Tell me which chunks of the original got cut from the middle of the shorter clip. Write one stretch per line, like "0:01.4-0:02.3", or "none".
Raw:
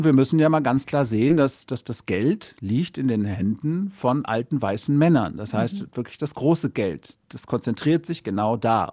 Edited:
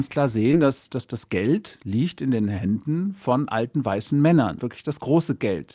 0:05.3-0:05.9